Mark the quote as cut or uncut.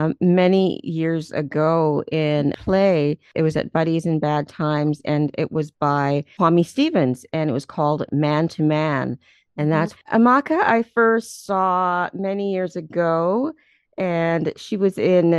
cut